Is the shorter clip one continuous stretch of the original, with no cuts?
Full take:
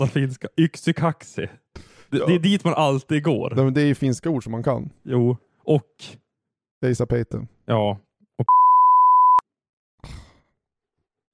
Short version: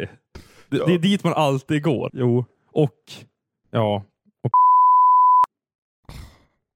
no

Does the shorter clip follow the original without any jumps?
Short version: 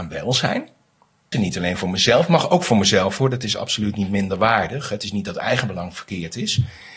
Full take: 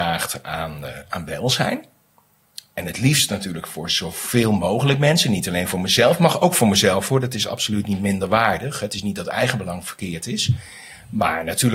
no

